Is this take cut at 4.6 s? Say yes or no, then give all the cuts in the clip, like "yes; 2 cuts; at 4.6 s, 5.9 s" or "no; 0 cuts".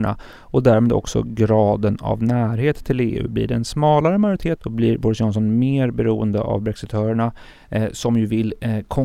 yes; 1 cut; at 4.6 s